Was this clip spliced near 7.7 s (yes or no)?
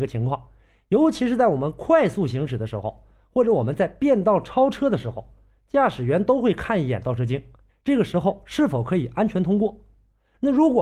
yes